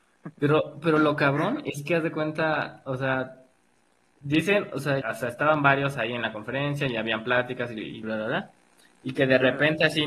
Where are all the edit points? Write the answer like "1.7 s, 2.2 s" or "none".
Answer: 5.0 s, 8.0 s